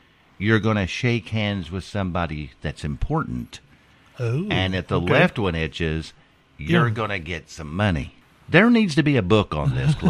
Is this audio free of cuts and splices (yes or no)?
yes